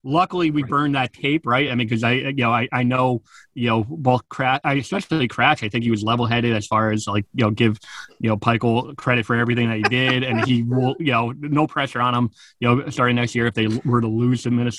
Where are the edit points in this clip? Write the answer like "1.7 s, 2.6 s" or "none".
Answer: none

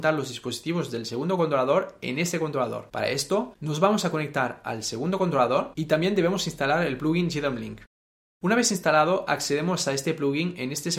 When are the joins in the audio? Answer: none

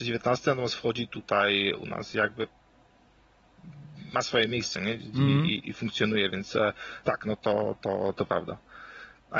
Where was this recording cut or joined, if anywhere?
5.6 s

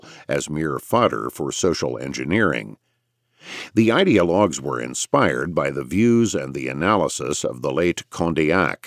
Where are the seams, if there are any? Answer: none

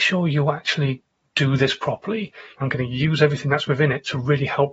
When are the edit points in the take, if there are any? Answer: 2.6 s

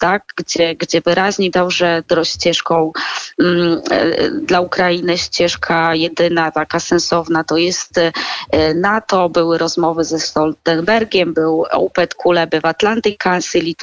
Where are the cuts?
1.5 s

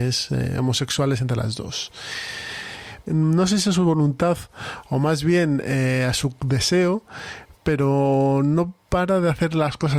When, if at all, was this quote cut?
3.1 s

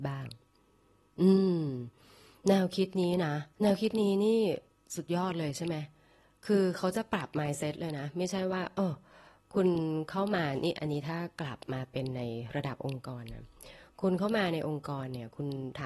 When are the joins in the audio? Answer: 3.5 s

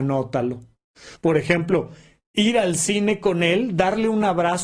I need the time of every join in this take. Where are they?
1.2 s

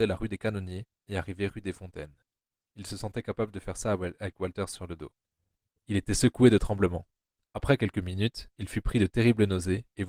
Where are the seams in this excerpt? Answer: 5.8 s

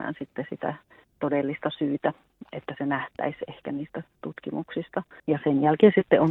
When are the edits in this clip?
5.2 s

